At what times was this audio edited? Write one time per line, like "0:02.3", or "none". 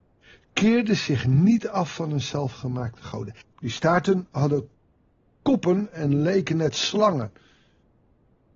0:03.4